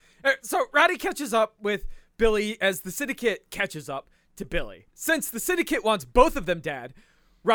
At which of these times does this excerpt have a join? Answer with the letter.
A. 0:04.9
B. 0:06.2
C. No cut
A